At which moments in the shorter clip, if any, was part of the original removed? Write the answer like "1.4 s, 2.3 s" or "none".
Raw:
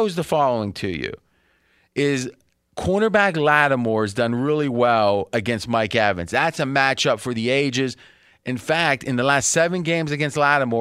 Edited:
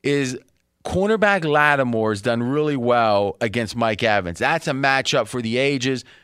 none